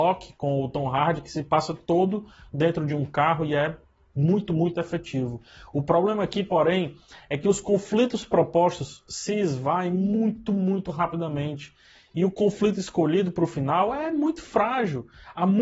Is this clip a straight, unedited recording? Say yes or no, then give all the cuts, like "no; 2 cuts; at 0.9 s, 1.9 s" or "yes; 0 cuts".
yes; 0 cuts